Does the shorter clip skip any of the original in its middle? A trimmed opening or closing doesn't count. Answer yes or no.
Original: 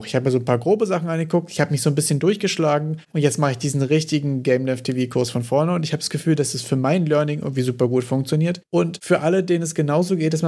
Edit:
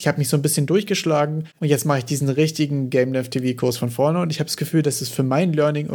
no